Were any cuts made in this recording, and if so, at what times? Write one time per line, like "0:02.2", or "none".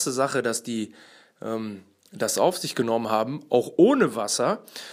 none